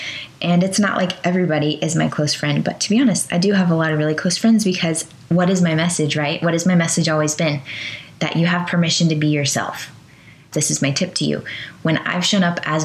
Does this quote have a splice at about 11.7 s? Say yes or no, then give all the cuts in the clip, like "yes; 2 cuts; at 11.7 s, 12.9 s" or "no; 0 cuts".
no; 0 cuts